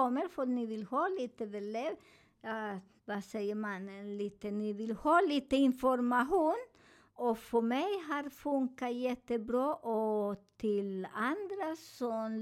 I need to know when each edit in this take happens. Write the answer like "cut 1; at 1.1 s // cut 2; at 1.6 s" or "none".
cut 1; at 3.0 s // cut 2; at 7.1 s